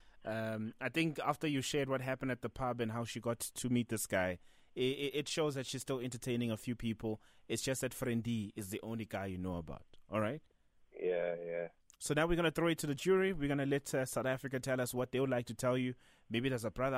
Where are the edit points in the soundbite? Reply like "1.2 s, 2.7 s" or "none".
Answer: none